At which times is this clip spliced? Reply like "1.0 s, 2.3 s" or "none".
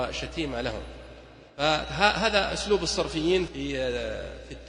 1.5 s, 3.5 s